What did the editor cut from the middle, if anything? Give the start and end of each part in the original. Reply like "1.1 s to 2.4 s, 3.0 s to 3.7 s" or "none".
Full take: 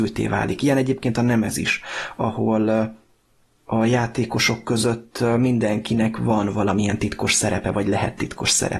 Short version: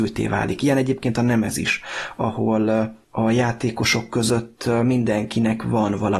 3.0 s to 3.6 s